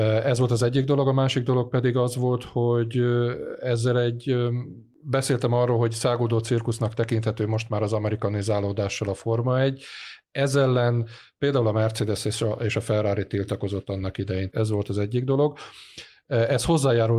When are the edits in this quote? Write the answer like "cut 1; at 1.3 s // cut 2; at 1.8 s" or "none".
cut 1; at 14.5 s